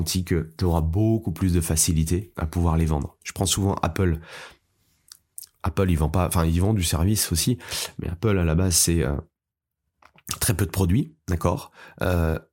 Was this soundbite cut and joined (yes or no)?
yes